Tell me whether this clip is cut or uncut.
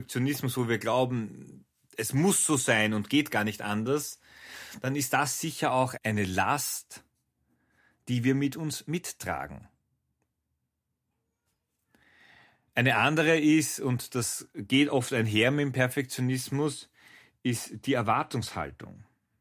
cut